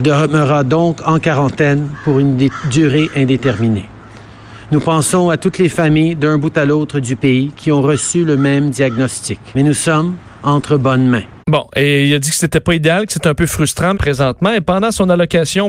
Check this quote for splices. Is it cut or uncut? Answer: cut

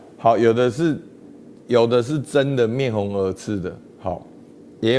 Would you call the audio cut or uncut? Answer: uncut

